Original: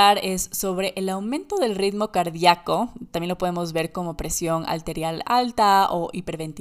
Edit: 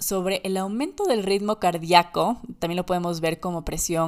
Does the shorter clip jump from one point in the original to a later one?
no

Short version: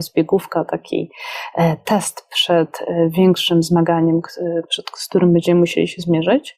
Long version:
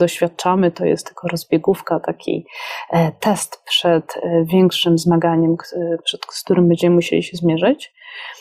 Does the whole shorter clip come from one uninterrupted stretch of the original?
yes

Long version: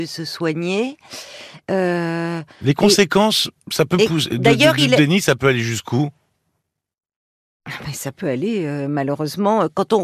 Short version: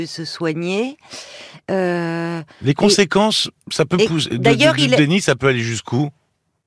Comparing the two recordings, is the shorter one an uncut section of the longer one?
yes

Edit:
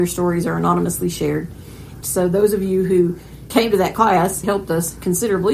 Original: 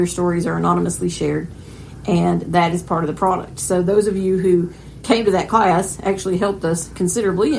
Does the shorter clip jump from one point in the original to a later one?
yes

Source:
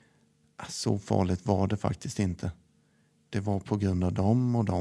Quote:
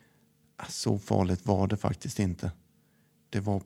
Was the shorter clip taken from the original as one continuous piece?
yes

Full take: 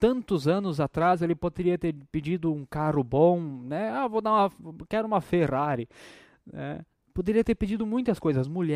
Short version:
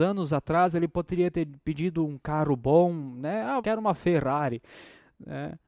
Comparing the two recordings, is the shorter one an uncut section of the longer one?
no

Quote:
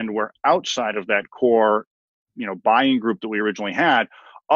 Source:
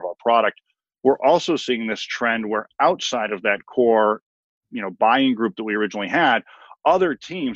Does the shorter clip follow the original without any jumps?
yes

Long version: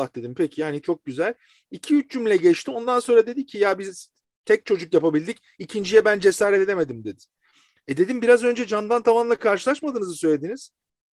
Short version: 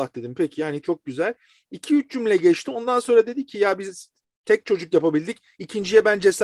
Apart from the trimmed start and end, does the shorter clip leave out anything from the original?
no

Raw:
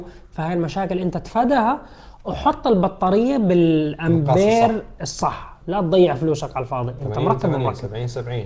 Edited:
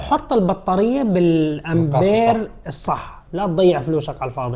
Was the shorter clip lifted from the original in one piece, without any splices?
yes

